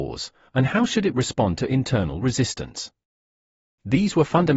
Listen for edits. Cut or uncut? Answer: uncut